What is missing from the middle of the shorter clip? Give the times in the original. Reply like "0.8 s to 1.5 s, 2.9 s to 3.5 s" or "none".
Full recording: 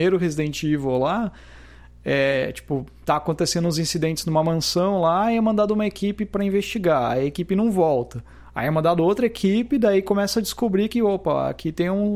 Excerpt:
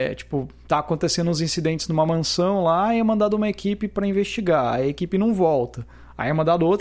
none